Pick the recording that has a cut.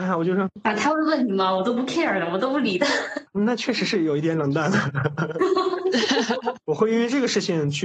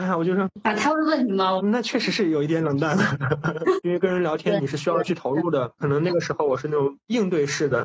second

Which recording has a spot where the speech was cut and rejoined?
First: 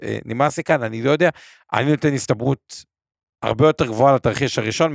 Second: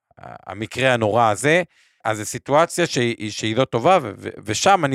second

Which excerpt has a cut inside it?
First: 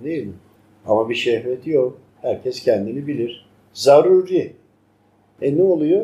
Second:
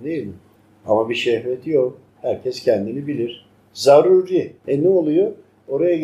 second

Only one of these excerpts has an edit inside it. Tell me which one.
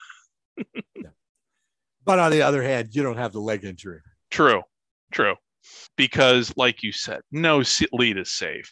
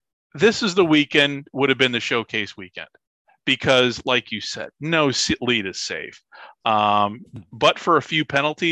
first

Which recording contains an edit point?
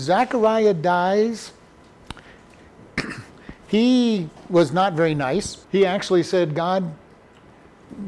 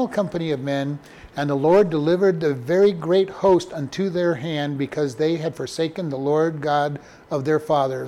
first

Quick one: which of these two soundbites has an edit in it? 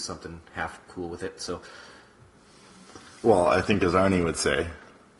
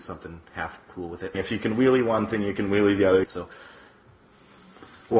second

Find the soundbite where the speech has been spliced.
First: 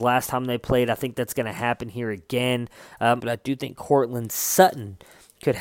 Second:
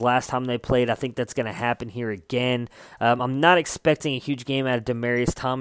first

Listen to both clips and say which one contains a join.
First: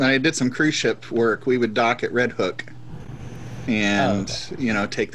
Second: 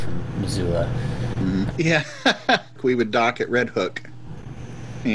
second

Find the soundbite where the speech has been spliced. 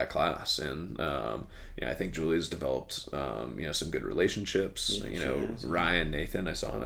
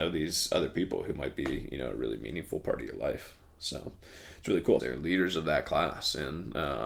second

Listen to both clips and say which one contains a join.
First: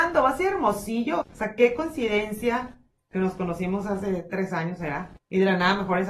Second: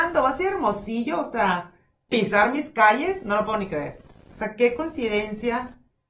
first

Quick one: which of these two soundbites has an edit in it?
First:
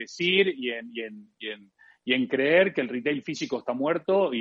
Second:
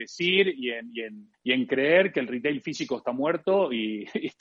second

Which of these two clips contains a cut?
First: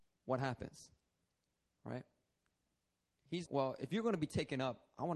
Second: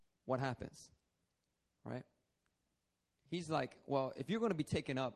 first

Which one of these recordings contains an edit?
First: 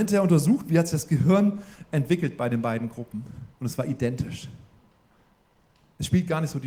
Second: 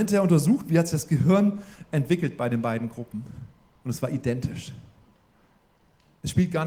first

